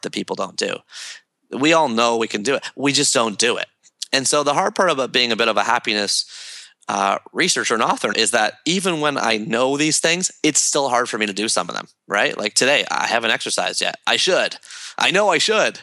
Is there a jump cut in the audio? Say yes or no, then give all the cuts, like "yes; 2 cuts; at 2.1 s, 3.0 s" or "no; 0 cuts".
yes; 1 cut; at 8.1 s